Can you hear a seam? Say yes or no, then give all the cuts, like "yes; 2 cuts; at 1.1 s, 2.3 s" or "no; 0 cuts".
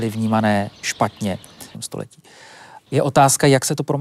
yes; 2 cuts; at 1.7 s, 2.8 s